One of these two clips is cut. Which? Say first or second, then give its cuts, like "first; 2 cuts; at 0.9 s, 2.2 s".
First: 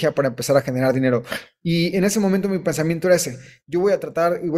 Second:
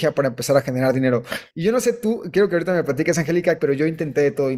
second; 2 cuts; at 1.5 s, 3.6 s